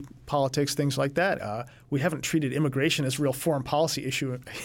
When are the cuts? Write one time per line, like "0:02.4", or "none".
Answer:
0:01.4